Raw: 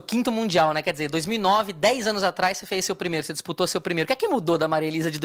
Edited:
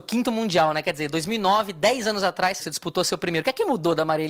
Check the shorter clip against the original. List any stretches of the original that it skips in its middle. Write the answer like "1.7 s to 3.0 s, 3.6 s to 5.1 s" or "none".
2.6 s to 3.2 s